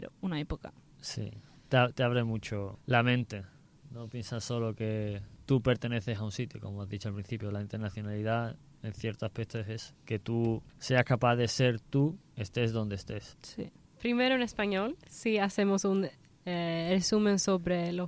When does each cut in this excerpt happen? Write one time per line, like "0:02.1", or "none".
none